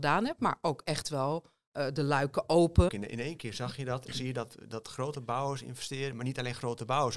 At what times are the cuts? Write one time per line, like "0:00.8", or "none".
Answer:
0:02.9

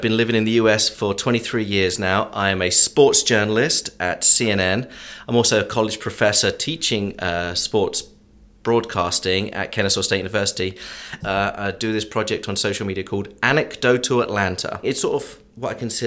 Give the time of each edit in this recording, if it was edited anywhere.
0:11.2
0:14.8

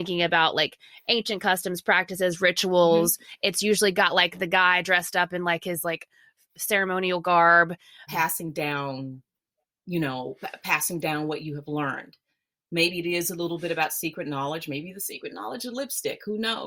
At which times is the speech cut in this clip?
0:08.1

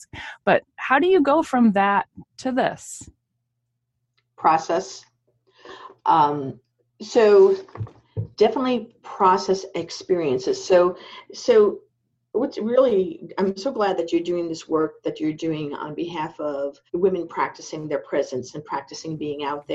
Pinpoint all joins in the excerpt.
0:16.9

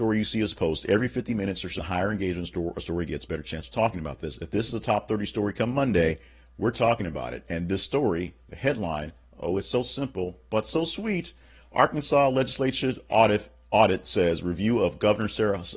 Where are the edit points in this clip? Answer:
0:01.8

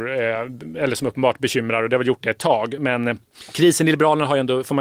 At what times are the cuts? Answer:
none

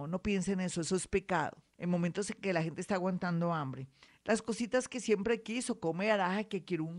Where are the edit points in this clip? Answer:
0:01.7
0:04.1

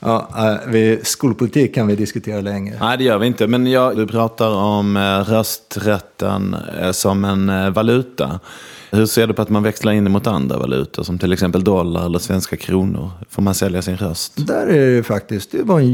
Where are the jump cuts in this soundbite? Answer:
0:03.9

